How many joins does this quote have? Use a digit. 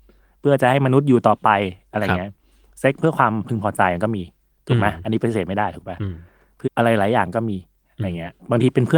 1